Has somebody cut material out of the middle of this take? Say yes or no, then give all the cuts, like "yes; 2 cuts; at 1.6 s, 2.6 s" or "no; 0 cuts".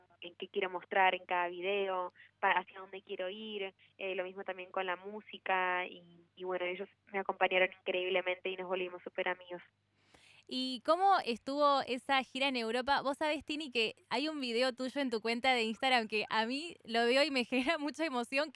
no; 0 cuts